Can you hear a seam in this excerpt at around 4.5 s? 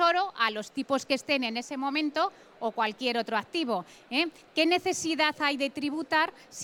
no; 0 cuts

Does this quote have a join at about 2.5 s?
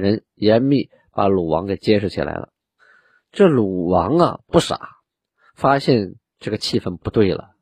no; 0 cuts

